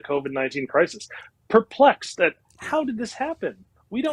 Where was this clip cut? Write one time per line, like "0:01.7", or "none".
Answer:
none